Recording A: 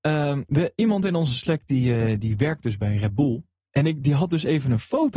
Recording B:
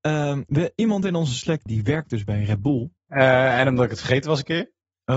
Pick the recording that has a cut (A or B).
B